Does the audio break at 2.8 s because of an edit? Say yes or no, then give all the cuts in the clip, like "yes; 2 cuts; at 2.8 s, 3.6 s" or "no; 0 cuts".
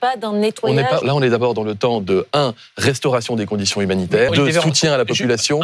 no; 2 cuts; at 1.0 s, 4.3 s